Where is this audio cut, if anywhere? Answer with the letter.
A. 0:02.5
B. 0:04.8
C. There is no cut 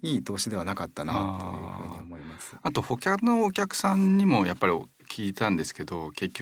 C